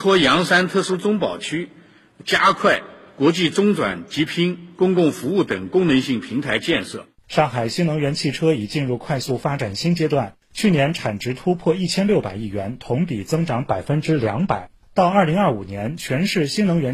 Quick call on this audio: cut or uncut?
cut